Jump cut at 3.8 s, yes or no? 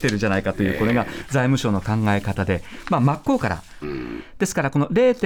yes